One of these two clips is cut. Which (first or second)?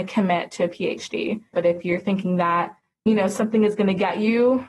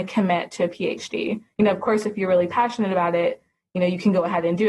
first